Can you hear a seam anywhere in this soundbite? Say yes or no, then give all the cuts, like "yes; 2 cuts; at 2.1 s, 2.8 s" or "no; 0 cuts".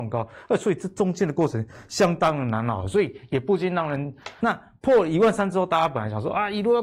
yes; 1 cut; at 4.4 s